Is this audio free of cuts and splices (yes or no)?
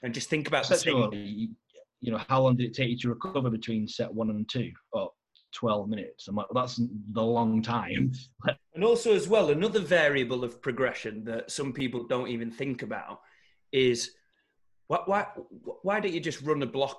no